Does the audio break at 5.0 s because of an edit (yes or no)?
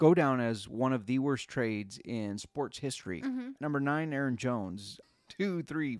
yes